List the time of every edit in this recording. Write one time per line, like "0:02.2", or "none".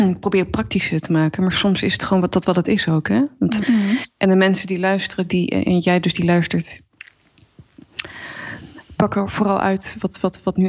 0:03.6
0:05.3